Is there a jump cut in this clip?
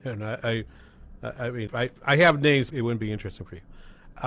yes; 2 cuts; at 1.7 s, 2.7 s

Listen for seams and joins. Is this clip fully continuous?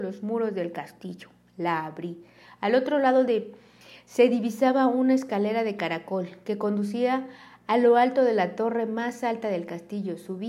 yes; 0 cuts

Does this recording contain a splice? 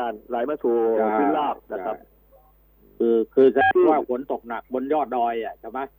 no; 0 cuts

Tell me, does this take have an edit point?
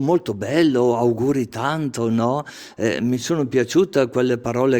no; 0 cuts

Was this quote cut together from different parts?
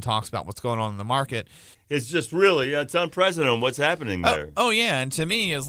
yes; 1 cut; at 1.7 s

